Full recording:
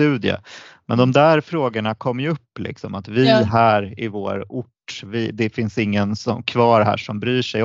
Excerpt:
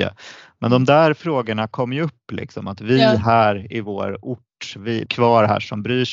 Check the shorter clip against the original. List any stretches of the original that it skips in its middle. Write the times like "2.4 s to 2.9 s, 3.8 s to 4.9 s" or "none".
5.3 s to 6.4 s